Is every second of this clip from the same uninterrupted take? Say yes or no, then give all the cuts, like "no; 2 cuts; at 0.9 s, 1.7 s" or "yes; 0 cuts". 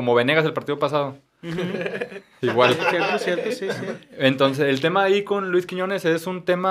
yes; 0 cuts